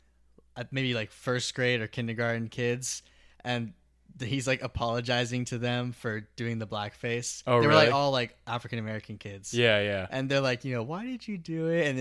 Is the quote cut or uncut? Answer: uncut